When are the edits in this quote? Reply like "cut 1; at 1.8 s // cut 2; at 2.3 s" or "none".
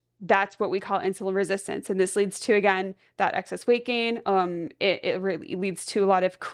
none